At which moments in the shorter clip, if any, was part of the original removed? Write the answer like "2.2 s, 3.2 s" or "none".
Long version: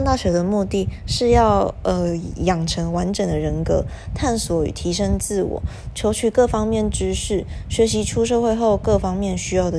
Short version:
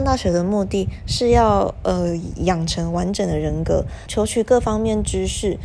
4.1 s